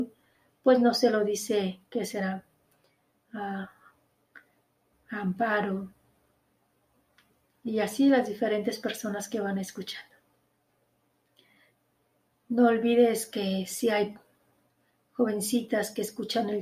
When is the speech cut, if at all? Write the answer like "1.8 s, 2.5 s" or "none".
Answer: 4.9 s